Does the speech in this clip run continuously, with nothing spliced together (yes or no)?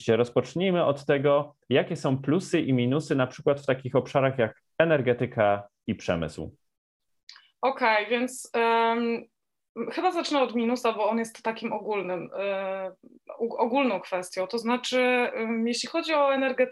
yes